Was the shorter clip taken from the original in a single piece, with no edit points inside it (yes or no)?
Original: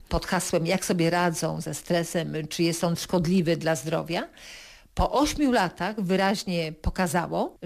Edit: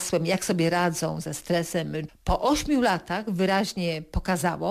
no